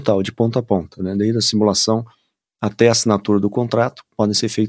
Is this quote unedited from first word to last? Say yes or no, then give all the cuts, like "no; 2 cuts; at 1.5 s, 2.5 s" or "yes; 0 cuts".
yes; 0 cuts